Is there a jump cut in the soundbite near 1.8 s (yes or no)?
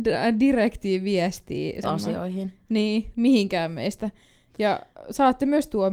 yes